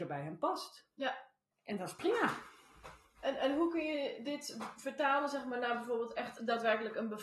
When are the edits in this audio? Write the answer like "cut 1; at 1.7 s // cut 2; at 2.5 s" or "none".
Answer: cut 1; at 1.5 s